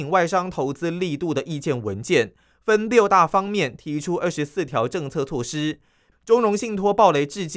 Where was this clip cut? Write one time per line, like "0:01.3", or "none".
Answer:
0:06.1